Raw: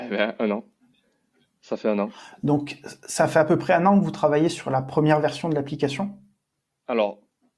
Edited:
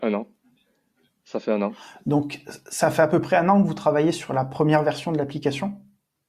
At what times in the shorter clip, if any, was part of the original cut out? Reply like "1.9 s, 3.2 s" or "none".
none